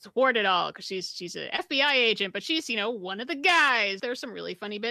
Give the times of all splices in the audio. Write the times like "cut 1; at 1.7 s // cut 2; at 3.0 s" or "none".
cut 1; at 4.0 s